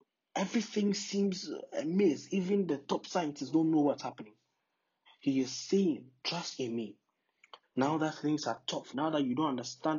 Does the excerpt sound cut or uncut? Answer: cut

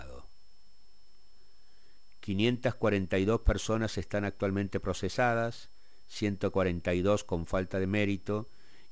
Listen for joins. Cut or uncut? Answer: uncut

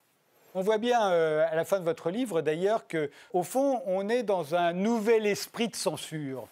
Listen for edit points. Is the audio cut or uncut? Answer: cut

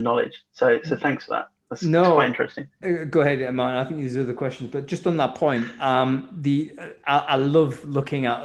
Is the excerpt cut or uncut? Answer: uncut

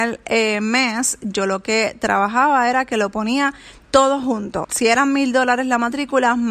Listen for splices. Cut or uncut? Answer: cut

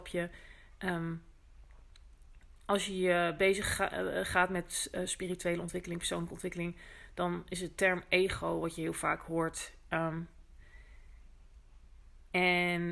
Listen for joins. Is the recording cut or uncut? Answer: uncut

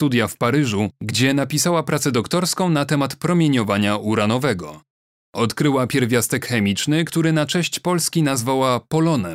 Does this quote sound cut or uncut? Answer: uncut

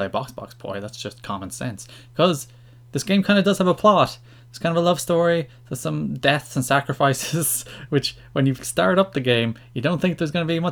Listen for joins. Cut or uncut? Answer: uncut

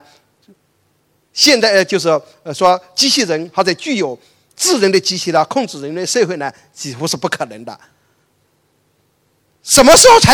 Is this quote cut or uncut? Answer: uncut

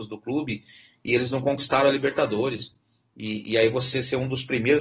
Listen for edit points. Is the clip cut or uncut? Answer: uncut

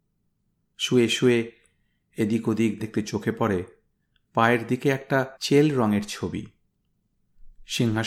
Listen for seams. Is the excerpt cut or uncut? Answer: cut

